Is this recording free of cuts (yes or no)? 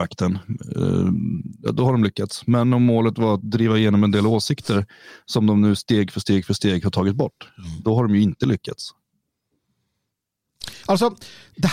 no